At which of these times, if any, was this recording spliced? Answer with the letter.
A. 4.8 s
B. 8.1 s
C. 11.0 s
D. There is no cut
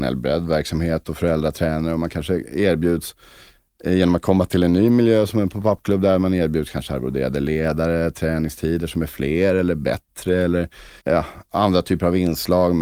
C